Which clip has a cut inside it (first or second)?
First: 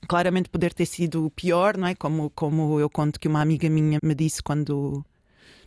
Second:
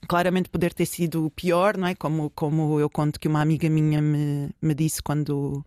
first